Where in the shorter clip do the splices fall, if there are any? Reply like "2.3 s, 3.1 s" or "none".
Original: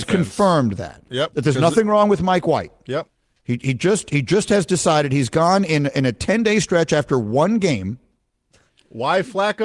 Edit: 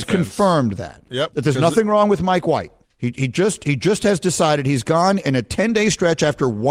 2.8 s, 5.2 s